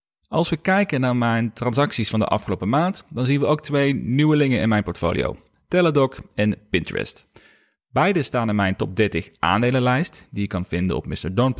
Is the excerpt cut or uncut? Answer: uncut